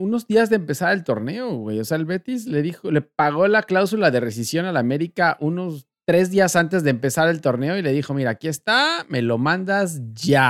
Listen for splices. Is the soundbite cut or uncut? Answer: uncut